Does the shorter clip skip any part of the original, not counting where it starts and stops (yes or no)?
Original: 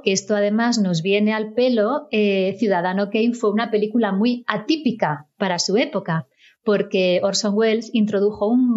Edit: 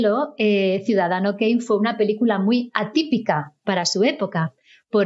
no